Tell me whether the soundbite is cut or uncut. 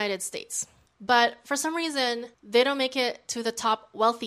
uncut